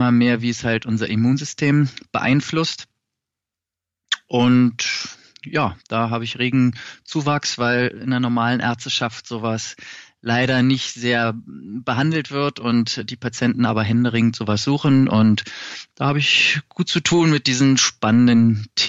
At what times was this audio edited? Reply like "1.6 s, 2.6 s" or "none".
none